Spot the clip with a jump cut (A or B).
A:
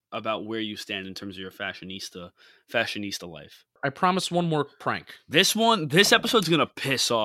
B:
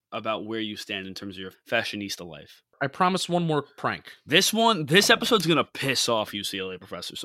B